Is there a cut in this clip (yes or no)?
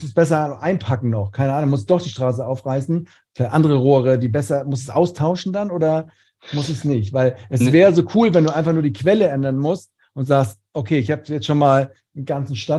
no